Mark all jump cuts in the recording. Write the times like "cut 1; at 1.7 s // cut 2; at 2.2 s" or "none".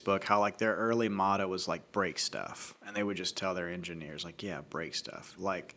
none